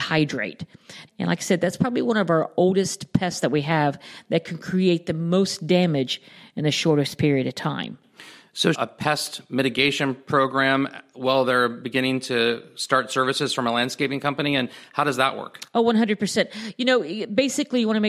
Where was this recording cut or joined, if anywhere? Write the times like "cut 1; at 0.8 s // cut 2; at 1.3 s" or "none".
cut 1; at 1.1 s // cut 2; at 8.7 s